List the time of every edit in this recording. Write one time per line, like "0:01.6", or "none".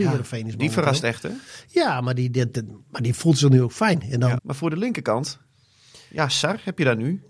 0:04.4